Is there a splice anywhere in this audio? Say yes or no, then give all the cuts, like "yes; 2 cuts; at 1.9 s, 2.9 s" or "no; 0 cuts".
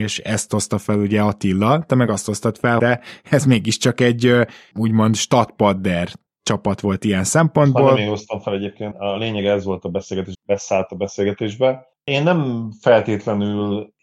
yes; 3 cuts; at 2.8 s, 8.9 s, 10.3 s